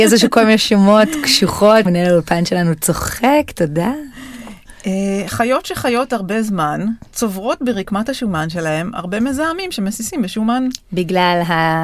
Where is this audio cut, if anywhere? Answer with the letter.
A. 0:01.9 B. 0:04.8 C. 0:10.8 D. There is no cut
A